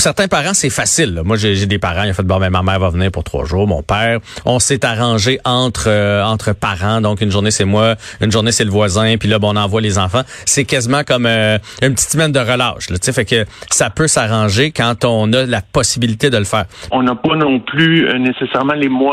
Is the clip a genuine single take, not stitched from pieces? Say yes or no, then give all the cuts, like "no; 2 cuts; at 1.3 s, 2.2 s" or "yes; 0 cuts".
no; 1 cut; at 16.9 s